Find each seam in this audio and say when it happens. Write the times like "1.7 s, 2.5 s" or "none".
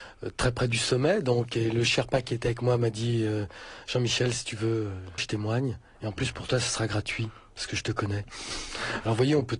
5.2 s